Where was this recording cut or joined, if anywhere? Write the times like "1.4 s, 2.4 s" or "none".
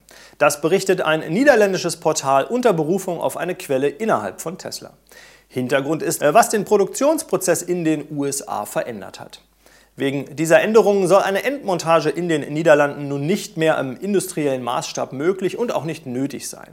6.2 s